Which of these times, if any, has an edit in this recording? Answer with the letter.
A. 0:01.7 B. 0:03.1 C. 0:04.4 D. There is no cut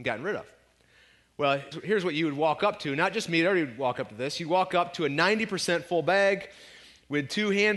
A